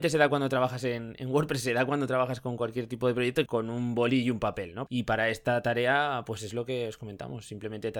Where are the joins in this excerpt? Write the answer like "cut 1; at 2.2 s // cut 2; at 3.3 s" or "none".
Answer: cut 1; at 3.5 s // cut 2; at 4.9 s